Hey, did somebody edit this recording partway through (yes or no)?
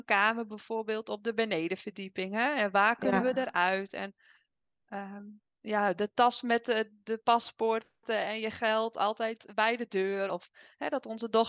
yes